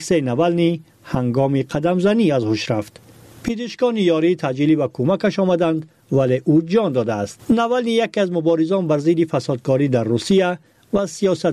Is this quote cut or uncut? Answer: uncut